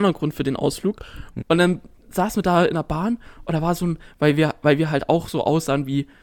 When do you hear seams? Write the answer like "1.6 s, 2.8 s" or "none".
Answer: 1.4 s, 4.1 s